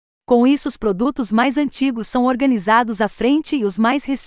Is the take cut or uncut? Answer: uncut